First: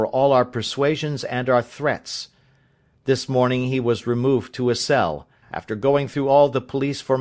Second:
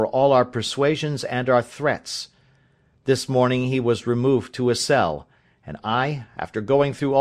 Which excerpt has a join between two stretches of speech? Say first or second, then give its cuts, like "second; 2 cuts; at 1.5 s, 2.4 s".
first; 1 cut; at 5.4 s